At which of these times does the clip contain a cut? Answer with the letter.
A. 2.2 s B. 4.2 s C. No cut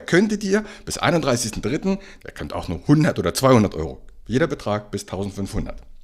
A